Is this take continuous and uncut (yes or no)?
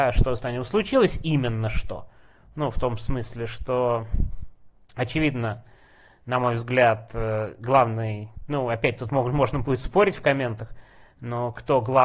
yes